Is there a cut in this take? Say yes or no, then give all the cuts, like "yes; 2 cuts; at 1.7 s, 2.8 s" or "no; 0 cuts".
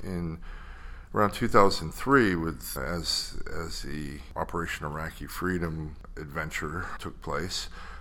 yes; 2 cuts; at 2.8 s, 7.0 s